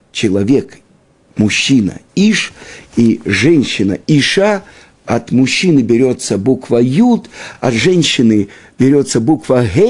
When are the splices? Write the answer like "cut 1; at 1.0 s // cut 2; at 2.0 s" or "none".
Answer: none